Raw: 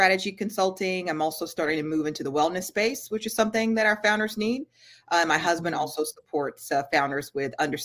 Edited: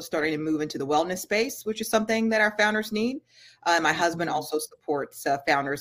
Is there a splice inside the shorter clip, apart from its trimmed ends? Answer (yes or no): no